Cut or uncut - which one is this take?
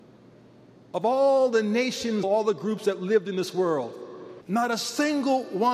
cut